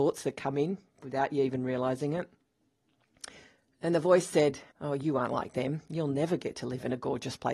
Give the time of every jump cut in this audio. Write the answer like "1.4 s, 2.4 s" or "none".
4.7 s